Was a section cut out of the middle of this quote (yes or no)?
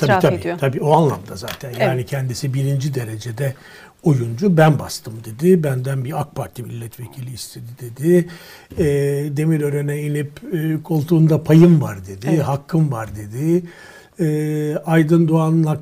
no